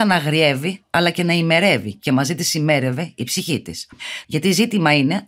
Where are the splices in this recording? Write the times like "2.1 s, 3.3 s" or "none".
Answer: 4.2 s